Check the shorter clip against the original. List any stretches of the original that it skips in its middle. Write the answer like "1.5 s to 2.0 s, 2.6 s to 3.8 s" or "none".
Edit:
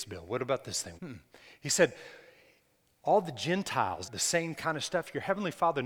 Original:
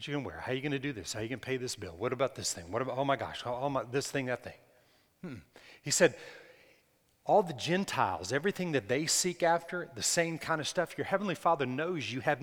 2.7 s to 5.2 s, 8.3 s to 9.9 s